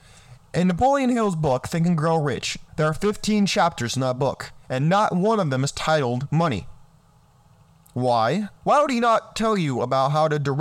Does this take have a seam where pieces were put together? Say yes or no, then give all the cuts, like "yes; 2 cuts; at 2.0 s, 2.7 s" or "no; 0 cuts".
yes; 2 cuts; at 2.7 s, 8.6 s